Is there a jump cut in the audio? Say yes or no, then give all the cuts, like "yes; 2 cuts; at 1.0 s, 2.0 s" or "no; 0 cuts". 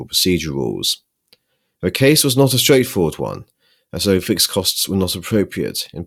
yes; 1 cut; at 1.8 s